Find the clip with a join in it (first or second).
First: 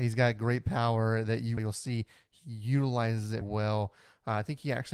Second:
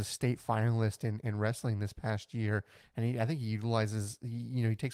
first